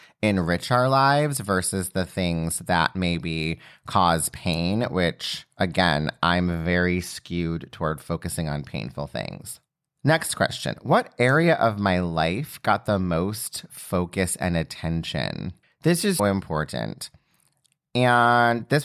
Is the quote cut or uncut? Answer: cut